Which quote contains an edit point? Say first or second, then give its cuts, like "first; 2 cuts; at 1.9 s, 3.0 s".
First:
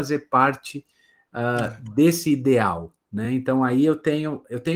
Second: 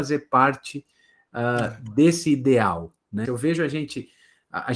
second; 1 cut; at 3.2 s